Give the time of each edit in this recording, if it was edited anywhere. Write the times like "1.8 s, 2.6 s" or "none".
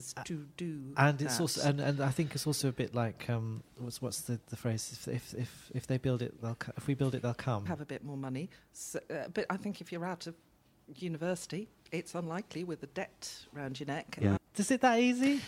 7.7 s, 14.4 s